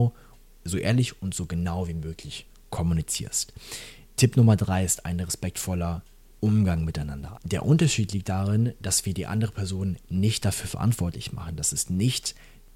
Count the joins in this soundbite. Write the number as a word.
one